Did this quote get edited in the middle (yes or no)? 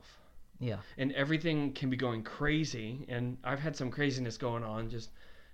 no